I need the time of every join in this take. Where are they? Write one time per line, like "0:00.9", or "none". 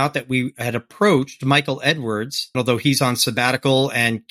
0:02.5

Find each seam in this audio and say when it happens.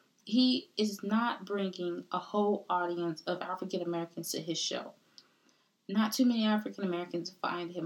none

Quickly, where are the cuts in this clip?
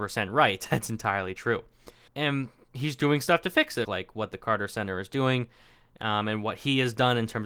0:02.1
0:03.8

